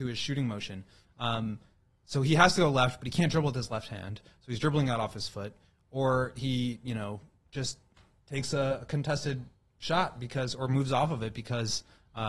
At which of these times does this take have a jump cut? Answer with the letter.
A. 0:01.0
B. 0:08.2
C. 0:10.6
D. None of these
A